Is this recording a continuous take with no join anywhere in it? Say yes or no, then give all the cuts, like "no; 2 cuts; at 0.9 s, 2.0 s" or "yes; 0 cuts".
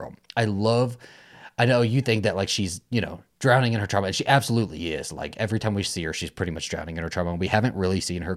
yes; 0 cuts